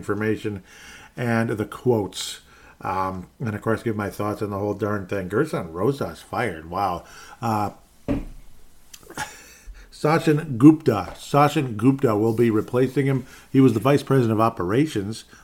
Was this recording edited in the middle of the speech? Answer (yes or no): no